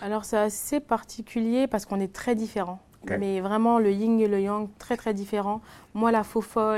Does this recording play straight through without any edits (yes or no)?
yes